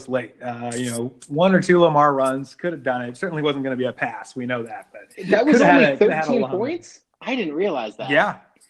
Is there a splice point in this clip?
no; 0 cuts

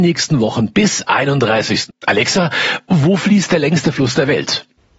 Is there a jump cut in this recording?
yes; 1 cut; at 1.9 s

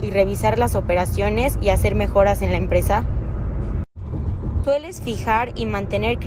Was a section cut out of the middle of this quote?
yes; 1 cut; at 4.6 s

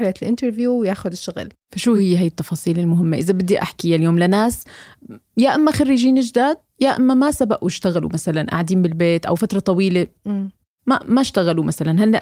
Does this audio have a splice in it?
no; 0 cuts

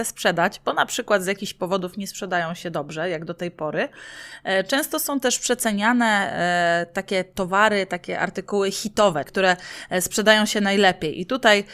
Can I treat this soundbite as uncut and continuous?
no; 1 cut; at 9.3 s

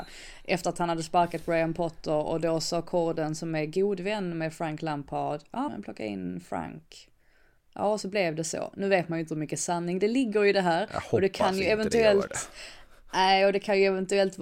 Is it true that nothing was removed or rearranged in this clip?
no; 1 cut; at 5.7 s

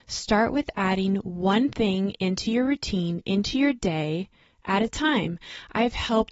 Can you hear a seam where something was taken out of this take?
no; 0 cuts

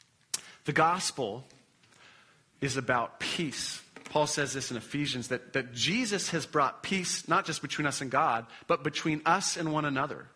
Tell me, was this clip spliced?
no; 0 cuts

